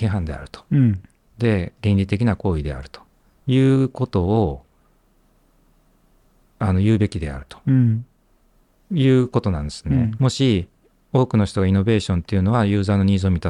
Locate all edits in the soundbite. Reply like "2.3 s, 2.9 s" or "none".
10.1 s